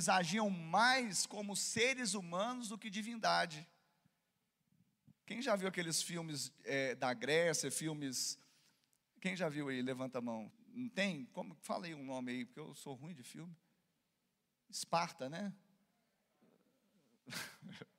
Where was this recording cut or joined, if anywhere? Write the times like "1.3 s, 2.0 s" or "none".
10.5 s